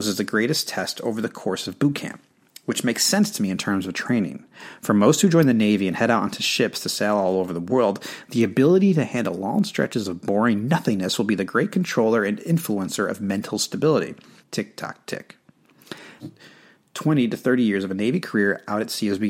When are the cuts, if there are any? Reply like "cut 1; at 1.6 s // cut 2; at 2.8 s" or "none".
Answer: cut 1; at 14.4 s // cut 2; at 16.2 s